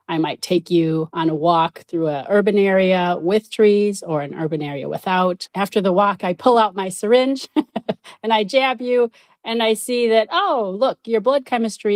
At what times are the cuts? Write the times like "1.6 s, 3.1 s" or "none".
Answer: none